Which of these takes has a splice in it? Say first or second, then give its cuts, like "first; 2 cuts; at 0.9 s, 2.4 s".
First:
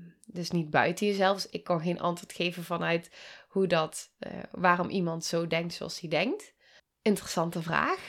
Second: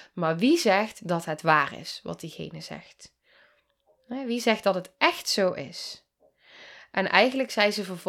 first; 1 cut; at 6.8 s